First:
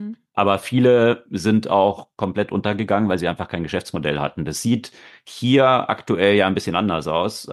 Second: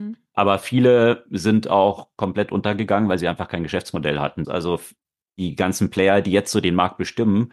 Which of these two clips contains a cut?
second; 1 cut; at 4.4 s

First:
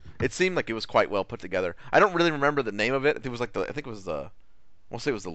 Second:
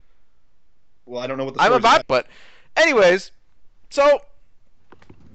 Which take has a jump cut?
second; 1 cut; at 2.0 s

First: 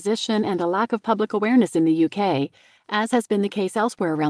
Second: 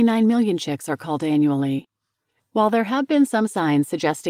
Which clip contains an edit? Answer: second; 1 cut; at 2.4 s

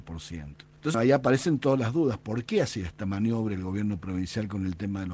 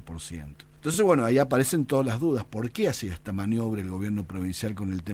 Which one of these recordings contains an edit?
first; 1 cut; at 0.9 s

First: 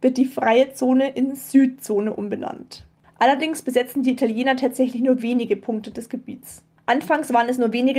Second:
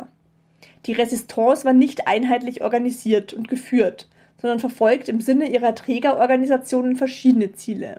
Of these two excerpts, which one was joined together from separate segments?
first; 2 cuts; at 3.0 s, 6.8 s

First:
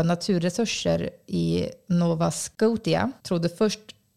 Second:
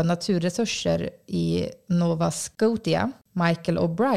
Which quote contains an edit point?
first; 1 cut; at 3.2 s

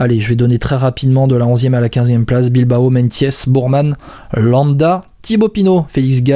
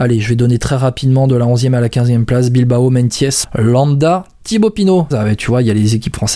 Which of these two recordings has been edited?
second; 2 cuts; at 3.4 s, 5.1 s

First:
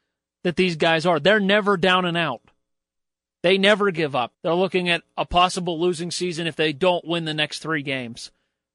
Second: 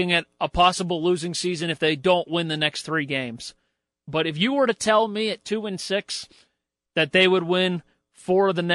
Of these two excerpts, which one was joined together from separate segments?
first; 1 cut; at 4.3 s

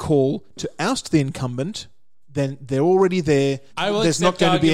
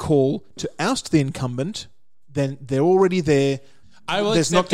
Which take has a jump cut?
first; 1 cut; at 3.7 s

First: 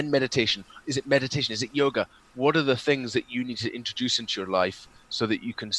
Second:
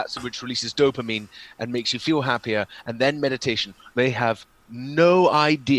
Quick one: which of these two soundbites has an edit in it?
second; 1 cut; at 3.9 s

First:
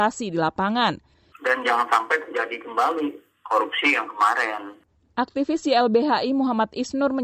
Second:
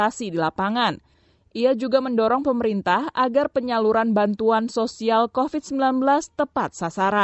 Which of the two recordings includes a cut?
first; 1 cut; at 1.3 s

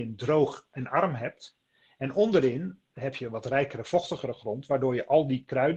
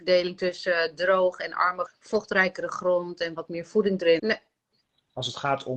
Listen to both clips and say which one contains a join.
second; 2 cuts; at 1.9 s, 4.2 s

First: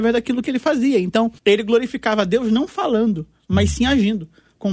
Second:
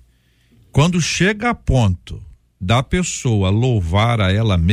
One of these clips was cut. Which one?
first; 1 cut; at 1.4 s

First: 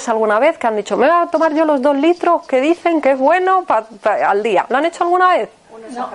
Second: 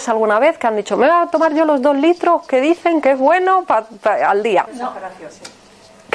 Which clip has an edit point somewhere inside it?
second; 1 cut; at 4.7 s

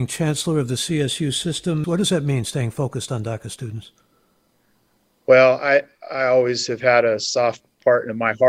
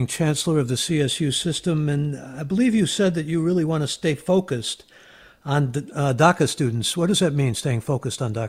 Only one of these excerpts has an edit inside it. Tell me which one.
first; 1 cut; at 1.8 s

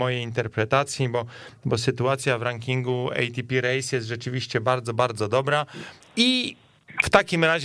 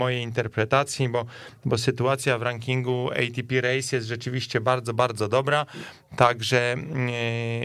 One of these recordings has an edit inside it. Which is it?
first; 1 cut; at 6.0 s

